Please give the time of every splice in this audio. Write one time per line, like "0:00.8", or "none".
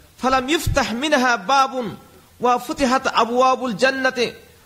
none